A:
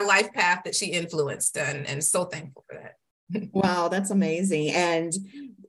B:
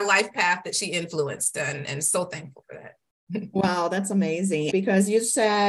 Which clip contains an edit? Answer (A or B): B